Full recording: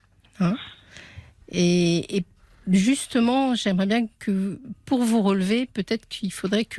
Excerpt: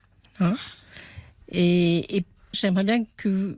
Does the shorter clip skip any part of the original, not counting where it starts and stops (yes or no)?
yes